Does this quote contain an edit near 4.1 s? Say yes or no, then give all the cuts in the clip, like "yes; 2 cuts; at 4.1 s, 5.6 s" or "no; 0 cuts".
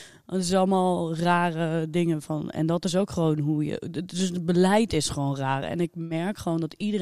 no; 0 cuts